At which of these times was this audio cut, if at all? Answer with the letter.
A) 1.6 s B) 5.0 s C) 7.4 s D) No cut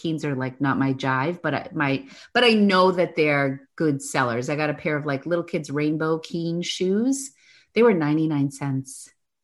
D